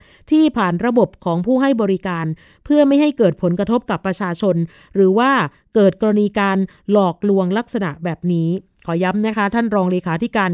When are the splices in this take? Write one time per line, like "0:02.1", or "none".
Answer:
none